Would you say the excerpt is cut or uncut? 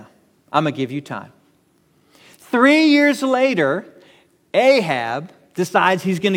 uncut